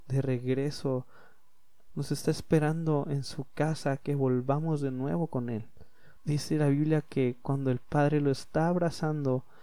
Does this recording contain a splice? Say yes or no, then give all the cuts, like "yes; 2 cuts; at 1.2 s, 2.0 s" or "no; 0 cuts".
yes; 1 cut; at 6.2 s